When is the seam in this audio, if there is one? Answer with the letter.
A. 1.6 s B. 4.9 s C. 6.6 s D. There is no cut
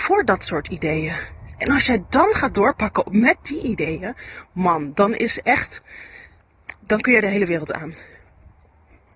D